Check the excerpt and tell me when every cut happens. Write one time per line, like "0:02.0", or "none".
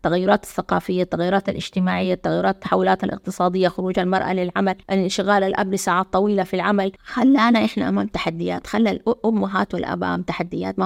0:04.8
0:07.0